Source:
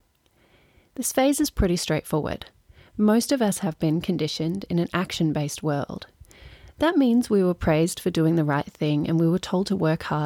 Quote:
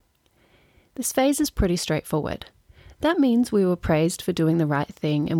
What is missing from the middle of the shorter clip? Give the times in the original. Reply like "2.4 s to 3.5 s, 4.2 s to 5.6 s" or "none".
2.8 s to 6.6 s

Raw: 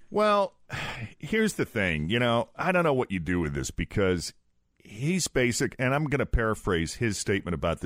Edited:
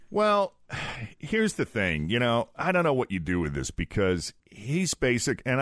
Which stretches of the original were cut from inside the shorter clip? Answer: 4.4 s to 4.7 s

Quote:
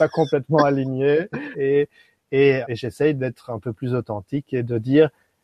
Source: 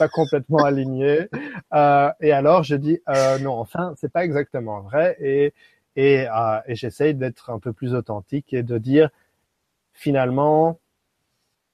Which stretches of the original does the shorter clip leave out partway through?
1.5 s to 5.2 s, 6.3 s to 6.6 s

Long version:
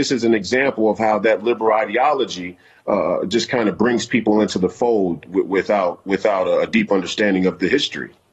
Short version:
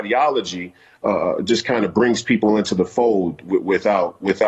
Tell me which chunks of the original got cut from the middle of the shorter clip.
none

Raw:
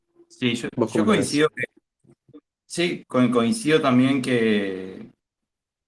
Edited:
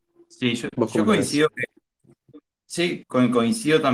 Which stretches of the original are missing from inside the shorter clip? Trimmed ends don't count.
none

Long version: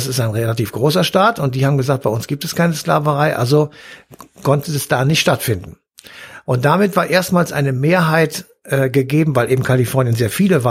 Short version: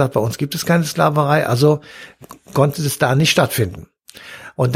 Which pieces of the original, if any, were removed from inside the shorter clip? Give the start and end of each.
none

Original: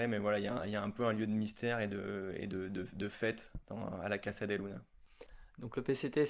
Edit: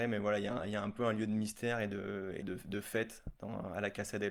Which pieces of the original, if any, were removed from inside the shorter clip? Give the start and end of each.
2.4 s to 2.7 s

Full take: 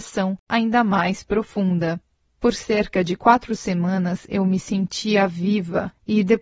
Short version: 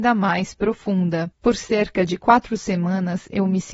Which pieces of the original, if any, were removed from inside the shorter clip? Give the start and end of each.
2.0 s to 2.3 s

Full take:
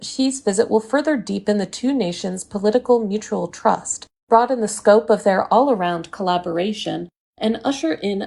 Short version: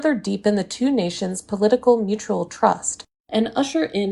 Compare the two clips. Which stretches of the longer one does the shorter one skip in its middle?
4.1 s to 7.2 s

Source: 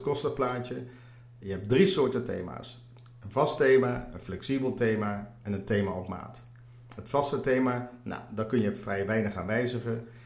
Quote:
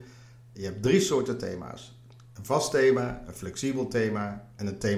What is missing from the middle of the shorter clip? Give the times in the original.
none

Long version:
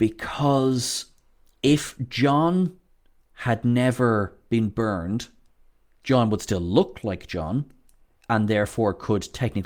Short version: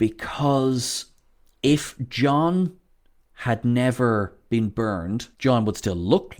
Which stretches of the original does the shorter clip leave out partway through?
5.3 s to 6.0 s

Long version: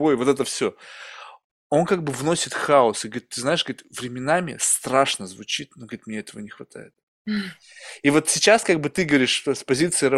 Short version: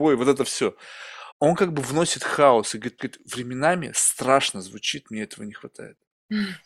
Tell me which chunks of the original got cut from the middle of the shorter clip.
1.3 s to 1.6 s, 3.3 s to 3.6 s, 5.7 s to 6.0 s

